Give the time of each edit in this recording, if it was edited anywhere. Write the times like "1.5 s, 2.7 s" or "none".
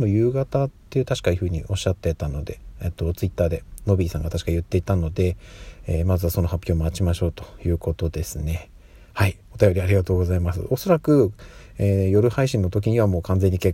none